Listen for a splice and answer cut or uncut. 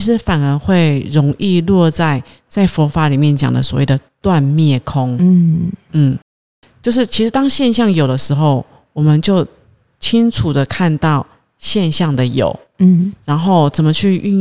uncut